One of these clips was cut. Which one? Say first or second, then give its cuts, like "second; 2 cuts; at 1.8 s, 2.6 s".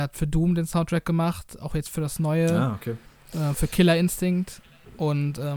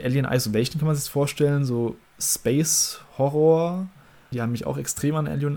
second; 1 cut; at 4.3 s